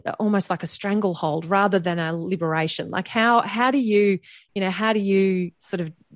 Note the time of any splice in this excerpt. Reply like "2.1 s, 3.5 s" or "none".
none